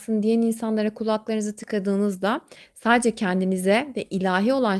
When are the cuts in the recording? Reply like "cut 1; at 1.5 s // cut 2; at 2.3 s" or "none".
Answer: none